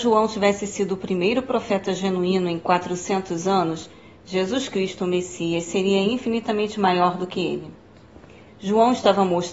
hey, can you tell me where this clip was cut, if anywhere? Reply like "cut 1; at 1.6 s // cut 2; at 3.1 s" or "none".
none

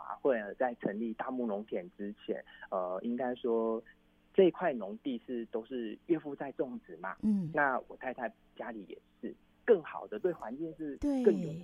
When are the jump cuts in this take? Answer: cut 1; at 7.5 s // cut 2; at 9.5 s

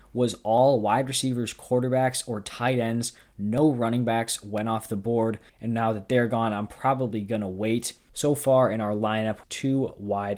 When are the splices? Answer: cut 1; at 5.5 s // cut 2; at 8.1 s // cut 3; at 9.4 s

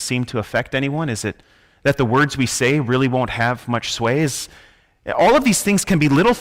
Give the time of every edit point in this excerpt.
none

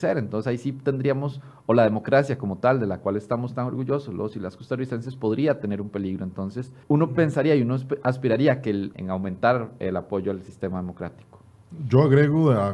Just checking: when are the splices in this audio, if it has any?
cut 1; at 6.8 s // cut 2; at 8.9 s

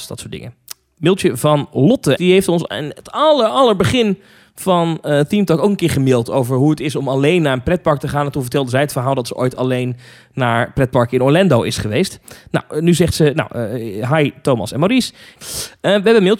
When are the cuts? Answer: cut 1; at 2.2 s // cut 2; at 15.4 s

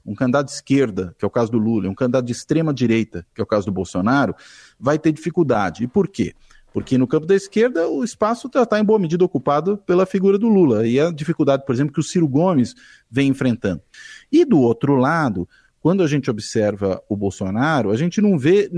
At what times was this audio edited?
none

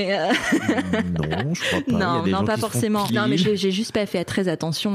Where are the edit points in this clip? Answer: cut 1; at 3.1 s

